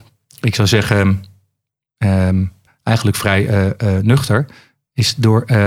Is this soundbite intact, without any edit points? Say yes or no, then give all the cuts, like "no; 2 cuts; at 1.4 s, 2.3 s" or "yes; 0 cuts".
yes; 0 cuts